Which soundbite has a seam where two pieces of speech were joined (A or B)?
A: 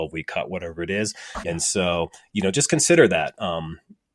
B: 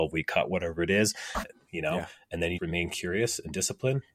B